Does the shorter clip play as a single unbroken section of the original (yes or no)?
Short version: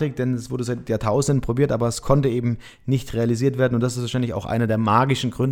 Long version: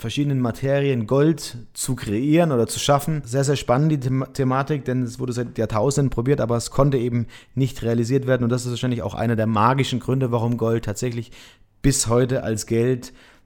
yes